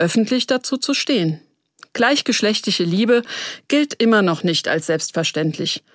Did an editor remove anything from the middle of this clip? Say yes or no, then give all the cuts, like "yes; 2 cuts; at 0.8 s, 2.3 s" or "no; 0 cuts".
no; 0 cuts